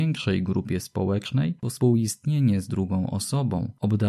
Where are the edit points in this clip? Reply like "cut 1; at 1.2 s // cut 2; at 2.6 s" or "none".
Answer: none